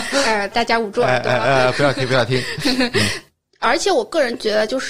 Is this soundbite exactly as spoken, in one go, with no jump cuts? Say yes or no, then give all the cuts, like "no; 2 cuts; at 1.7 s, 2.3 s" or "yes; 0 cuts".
yes; 0 cuts